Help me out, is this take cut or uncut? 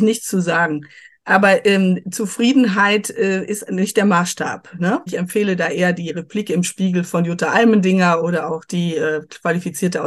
cut